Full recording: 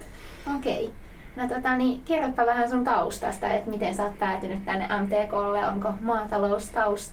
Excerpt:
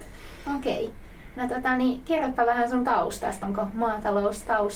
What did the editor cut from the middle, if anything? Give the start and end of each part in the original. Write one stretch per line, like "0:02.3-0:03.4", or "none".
0:03.4-0:05.7

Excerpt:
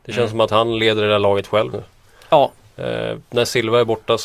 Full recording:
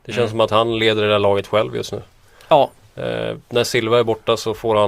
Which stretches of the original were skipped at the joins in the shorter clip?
0:01.7-0:01.9

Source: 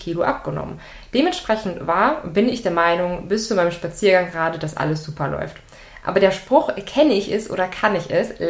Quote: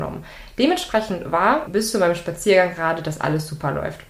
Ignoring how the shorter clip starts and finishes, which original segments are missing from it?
0:02.2-0:03.2

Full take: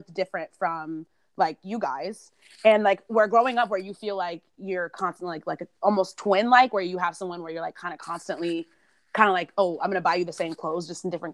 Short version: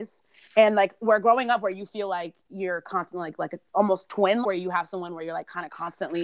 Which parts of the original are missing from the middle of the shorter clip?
0:06.5-0:06.7

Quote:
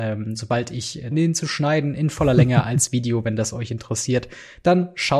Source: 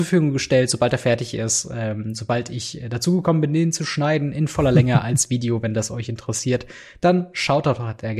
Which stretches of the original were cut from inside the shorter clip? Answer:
0:02.9-0:03.5

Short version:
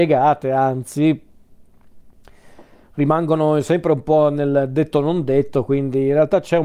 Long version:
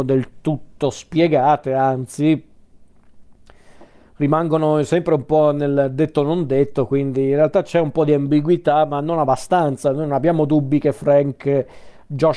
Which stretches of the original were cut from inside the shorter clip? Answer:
none

